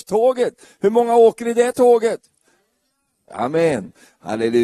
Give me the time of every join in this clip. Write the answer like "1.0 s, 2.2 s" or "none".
3.3 s